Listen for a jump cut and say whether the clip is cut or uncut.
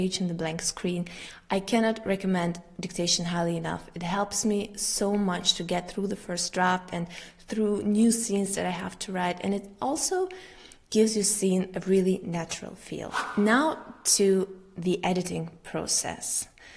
uncut